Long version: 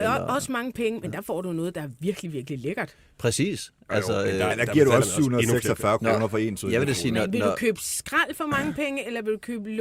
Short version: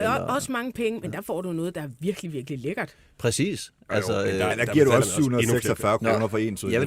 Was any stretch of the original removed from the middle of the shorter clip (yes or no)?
no